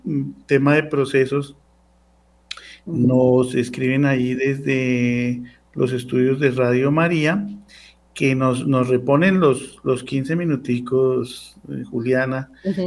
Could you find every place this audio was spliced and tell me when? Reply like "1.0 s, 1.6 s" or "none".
none